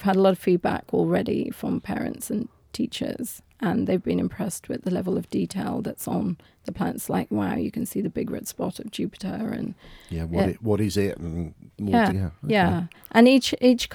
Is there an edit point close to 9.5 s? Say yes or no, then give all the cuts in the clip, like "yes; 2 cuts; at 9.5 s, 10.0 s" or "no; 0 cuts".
no; 1 cut; at 12.1 s